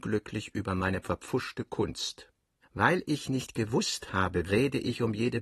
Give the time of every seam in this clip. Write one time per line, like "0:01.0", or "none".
0:02.6
0:04.5